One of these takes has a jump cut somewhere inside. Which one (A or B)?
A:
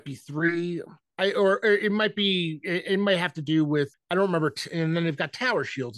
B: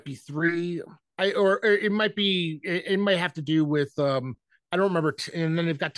A